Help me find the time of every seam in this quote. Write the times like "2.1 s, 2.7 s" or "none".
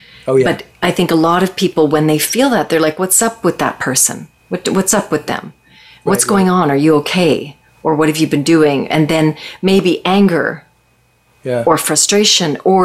none